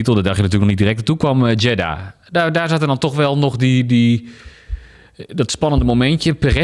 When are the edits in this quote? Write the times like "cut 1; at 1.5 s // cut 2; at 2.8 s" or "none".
none